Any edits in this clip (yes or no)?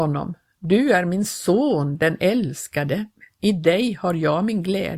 no